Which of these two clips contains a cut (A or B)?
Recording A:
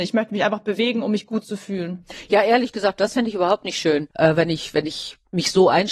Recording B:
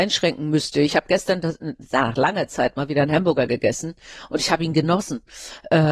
A